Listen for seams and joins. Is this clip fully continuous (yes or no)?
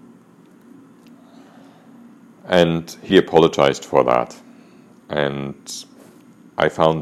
no